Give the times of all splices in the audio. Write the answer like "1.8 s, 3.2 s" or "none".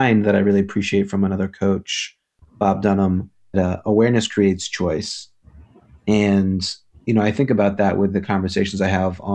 3.5 s

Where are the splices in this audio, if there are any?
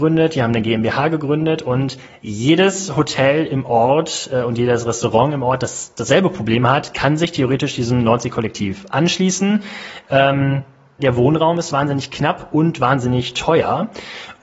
11.0 s

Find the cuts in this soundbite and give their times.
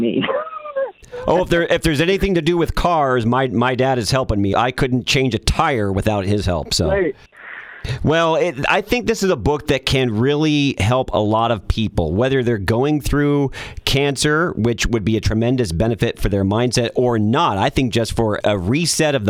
none

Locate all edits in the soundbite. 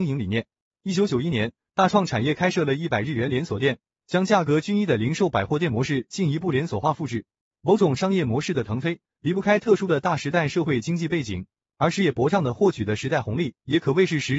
none

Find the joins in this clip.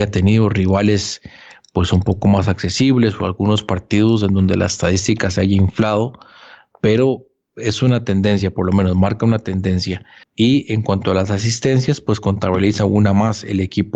10.2 s

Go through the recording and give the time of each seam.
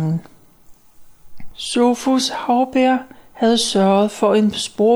none

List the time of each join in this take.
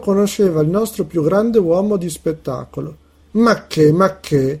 3.2 s

